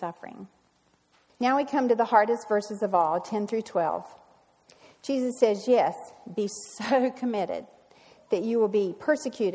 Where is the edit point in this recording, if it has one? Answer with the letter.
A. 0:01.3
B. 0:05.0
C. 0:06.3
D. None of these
A